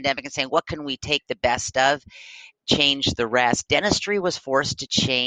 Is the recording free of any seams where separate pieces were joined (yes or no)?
yes